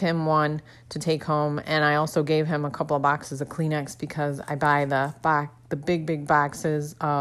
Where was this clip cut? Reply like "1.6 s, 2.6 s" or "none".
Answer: none